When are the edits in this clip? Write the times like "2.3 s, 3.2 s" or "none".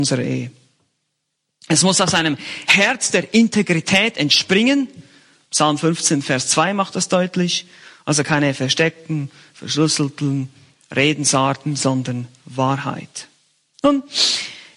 none